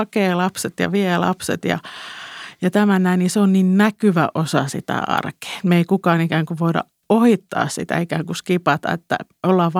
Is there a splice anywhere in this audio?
no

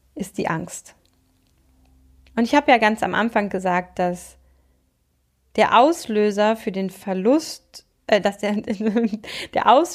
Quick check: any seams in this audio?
no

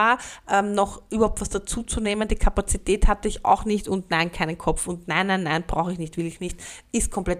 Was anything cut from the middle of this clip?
no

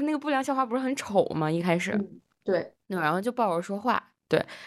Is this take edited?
yes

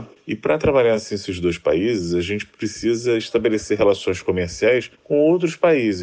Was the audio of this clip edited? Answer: no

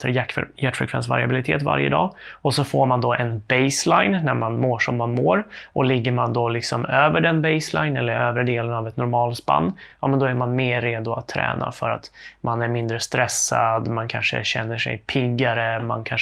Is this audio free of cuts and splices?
yes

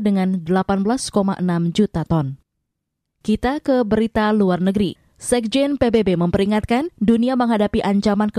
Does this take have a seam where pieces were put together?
no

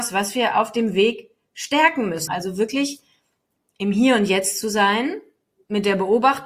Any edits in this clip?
yes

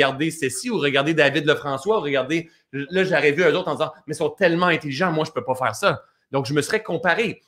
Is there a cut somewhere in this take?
no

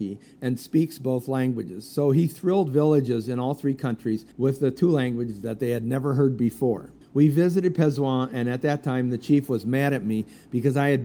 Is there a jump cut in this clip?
yes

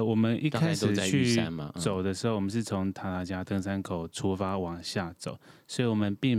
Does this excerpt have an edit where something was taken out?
no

